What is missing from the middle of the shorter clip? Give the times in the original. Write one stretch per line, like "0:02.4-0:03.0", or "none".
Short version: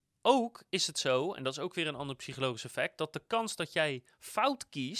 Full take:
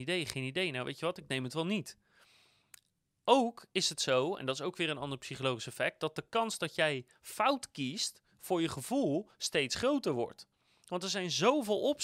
none

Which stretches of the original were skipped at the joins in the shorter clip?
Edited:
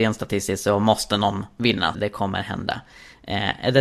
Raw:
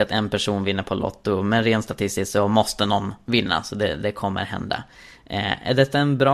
0:03.6-0:04.0

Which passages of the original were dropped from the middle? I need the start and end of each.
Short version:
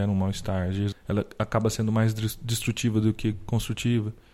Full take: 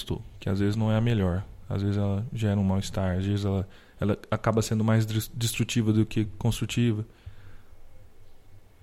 0:03.4-0:03.8

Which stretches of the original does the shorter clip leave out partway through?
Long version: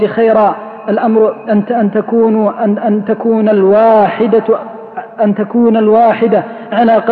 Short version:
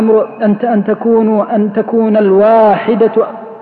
0:02.6-0:02.8

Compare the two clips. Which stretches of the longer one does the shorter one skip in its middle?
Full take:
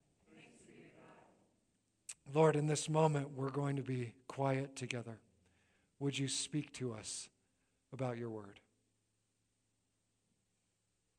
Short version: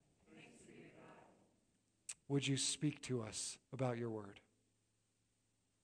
0:02.2-0:05.9
0:07.3-0:07.8

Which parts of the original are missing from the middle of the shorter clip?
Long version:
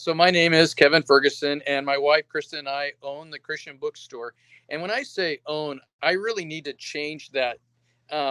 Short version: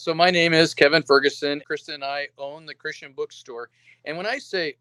0:01.6-0:02.3

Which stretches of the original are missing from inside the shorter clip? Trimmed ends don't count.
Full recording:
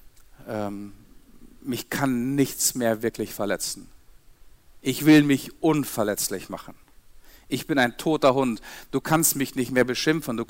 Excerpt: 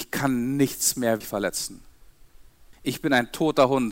0:03.0-0:03.3
0:04.8-0:07.4

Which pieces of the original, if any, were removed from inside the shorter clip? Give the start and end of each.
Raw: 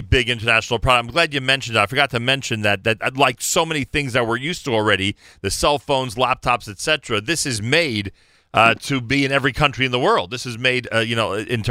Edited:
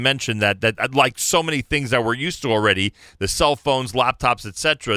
none

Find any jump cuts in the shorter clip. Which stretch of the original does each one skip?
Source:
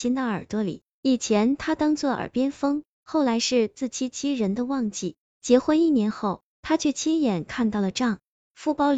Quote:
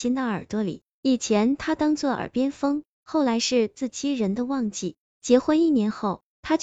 0:03.9-0:04.1

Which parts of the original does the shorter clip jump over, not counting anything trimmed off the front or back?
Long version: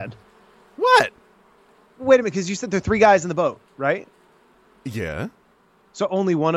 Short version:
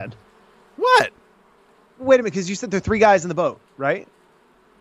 none

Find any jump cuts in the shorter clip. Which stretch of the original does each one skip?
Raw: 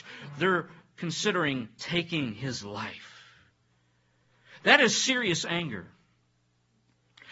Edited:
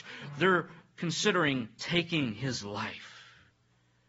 none

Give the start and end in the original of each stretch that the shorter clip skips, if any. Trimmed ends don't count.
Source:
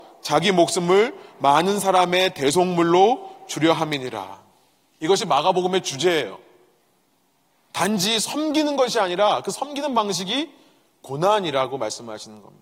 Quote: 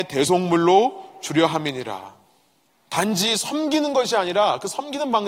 0:04.9-0:07.5

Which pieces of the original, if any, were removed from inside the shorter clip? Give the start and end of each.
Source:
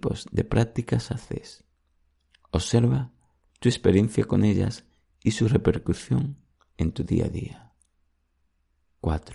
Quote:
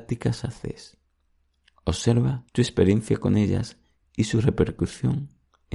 0:03.1-0:03.6

